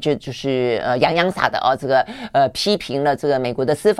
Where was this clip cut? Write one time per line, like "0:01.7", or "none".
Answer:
0:01.3